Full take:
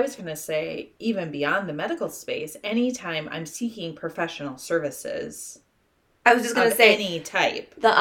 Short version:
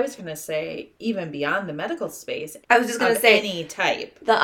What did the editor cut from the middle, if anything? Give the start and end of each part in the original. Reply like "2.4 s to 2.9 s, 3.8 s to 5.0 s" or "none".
2.6 s to 6.2 s